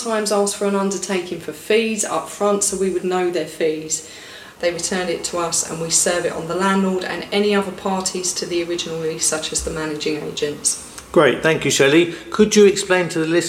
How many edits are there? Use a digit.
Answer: 1